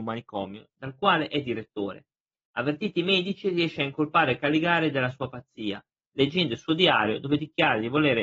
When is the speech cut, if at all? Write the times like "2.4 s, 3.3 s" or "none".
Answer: none

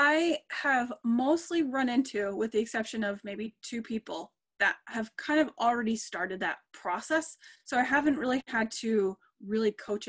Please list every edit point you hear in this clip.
none

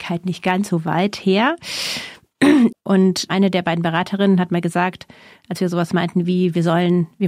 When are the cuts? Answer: 2.7 s

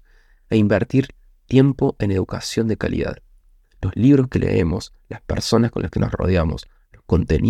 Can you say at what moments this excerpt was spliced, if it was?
none

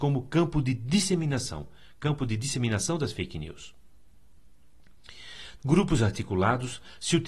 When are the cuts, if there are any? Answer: 5.6 s

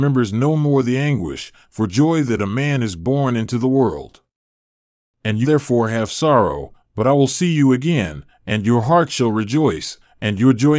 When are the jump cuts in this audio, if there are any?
5.4 s

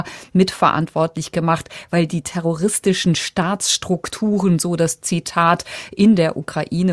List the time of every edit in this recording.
2.1 s

